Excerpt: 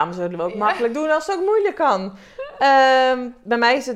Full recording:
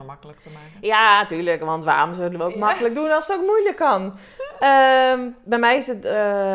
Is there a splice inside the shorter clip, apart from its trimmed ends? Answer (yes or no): no